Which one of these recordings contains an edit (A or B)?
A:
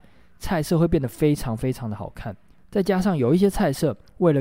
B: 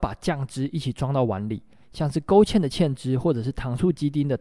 B